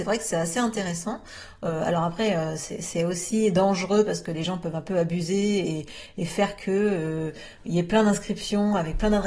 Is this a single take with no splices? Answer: yes; 0 cuts

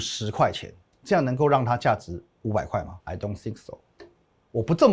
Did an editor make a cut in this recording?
yes; 2 cuts; at 1.0 s, 3.0 s

